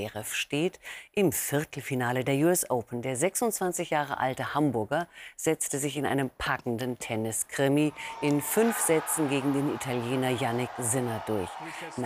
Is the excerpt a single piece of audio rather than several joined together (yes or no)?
yes